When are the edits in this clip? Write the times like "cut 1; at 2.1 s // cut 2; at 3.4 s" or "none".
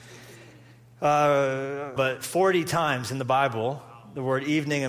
cut 1; at 2.0 s